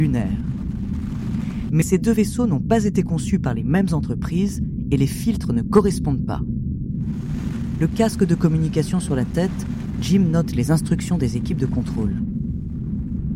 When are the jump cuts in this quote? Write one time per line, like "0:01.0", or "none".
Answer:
0:01.7